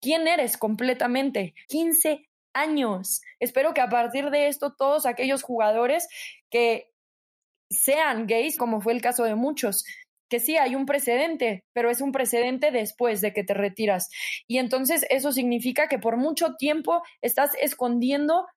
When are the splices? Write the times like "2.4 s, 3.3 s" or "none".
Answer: 1.6 s, 3.4 s, 8.6 s